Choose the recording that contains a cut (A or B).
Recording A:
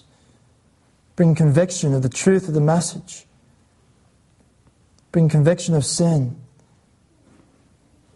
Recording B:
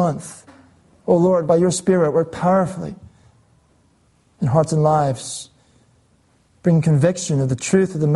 B